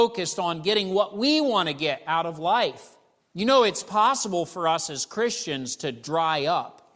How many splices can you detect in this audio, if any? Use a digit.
1